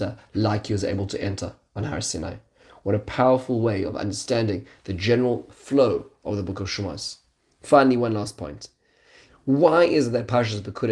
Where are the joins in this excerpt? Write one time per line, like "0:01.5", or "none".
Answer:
0:09.3